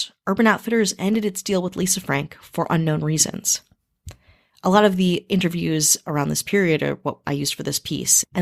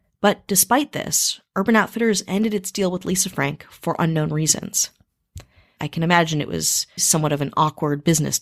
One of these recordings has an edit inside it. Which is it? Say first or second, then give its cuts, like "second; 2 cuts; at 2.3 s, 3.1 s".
second; 2 cuts; at 5.8 s, 7.0 s